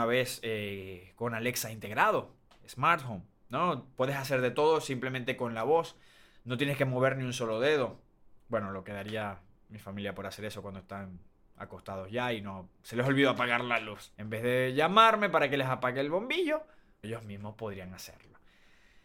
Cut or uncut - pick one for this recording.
cut